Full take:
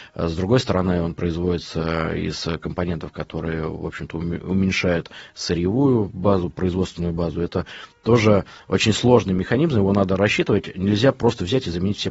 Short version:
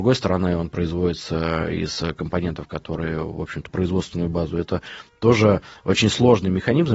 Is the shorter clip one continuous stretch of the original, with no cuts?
no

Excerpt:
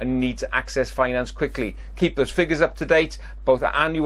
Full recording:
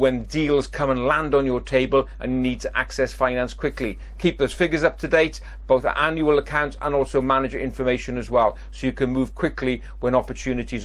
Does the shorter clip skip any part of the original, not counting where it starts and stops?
no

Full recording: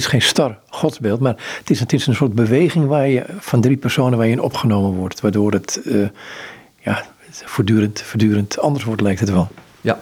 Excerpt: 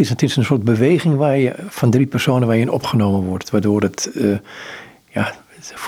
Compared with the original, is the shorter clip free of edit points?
yes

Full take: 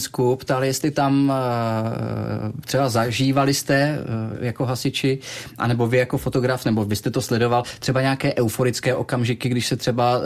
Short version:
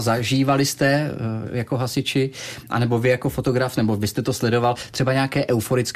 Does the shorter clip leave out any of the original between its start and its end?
no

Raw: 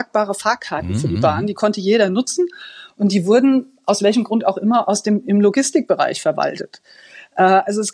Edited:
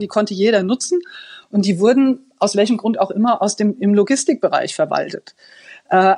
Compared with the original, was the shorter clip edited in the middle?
no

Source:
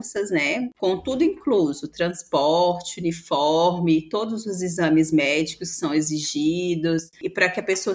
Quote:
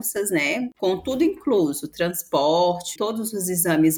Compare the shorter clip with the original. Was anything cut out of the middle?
yes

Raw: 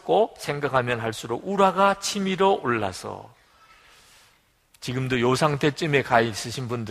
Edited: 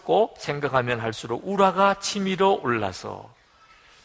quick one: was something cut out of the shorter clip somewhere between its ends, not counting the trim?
no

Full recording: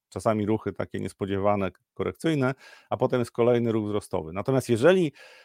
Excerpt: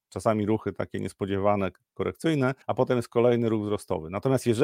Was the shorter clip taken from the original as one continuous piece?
no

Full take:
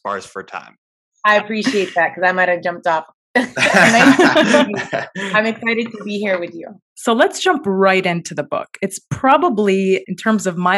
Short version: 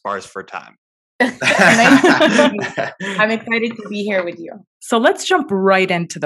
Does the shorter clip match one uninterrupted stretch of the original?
no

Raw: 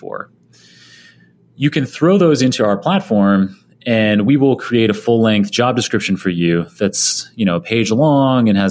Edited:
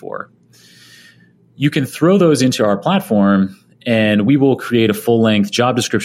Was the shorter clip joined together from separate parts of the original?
no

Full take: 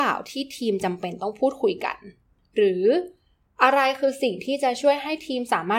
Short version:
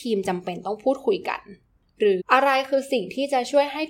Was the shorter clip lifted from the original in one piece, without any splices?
no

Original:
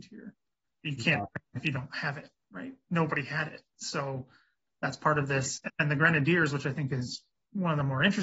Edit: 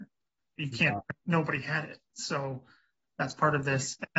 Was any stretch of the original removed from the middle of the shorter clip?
yes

